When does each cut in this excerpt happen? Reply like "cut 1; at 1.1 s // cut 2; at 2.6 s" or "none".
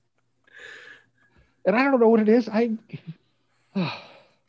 cut 1; at 3.2 s